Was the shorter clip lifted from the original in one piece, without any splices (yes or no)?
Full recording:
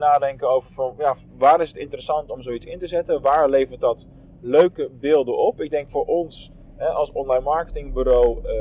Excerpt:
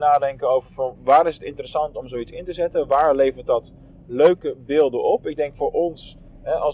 no